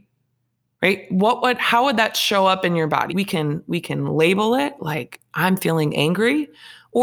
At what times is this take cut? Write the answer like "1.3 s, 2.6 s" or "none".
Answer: 3.1 s